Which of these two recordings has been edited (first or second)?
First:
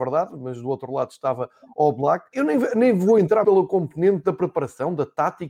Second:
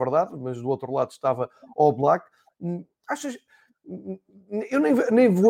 first